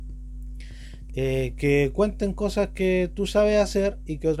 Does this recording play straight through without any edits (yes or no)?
no